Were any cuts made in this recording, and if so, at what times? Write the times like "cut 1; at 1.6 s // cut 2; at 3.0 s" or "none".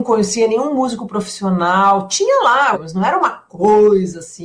cut 1; at 2.7 s

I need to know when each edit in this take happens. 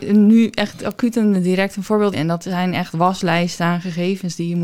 cut 1; at 2.1 s

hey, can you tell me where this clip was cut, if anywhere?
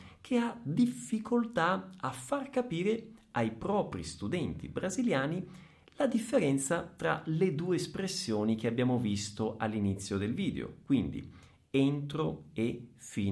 none

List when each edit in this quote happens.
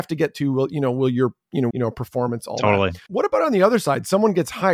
cut 1; at 1.7 s // cut 2; at 3.1 s

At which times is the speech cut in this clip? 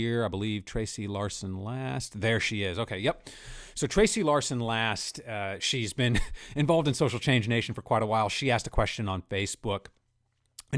none

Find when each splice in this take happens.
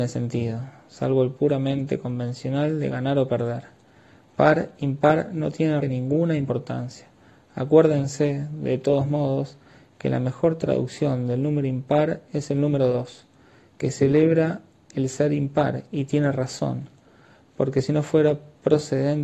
cut 1; at 5.8 s

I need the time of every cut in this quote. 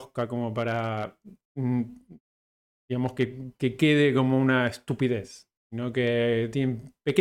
none

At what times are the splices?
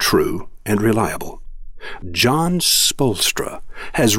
cut 1; at 2.0 s

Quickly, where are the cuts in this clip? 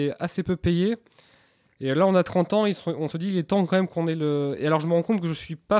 cut 1; at 3.1 s

